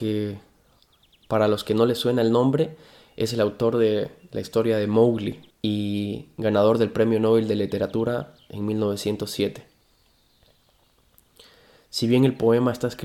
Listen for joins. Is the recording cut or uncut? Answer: cut